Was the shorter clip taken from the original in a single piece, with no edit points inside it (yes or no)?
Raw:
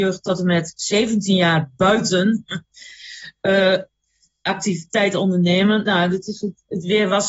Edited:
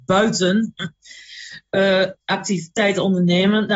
no